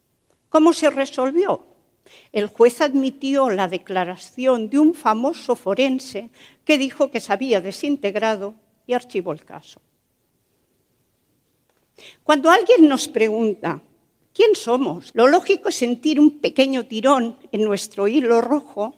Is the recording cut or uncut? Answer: cut